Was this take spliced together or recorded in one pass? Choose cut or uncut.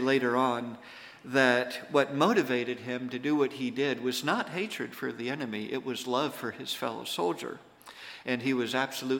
uncut